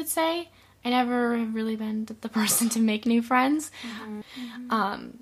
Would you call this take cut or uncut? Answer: cut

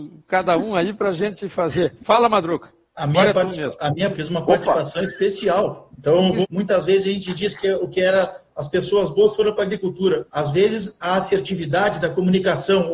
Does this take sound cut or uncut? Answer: cut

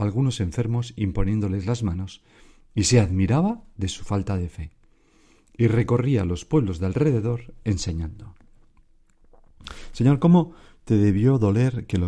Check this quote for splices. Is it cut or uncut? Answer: uncut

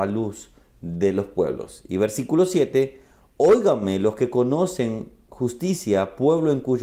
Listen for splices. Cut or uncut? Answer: uncut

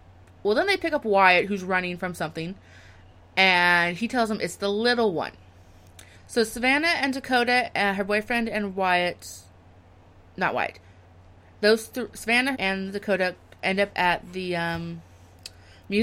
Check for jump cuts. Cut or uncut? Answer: cut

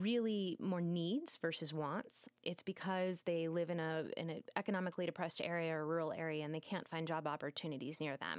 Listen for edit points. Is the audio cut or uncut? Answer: uncut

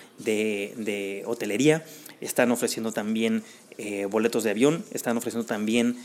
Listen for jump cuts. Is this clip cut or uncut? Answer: uncut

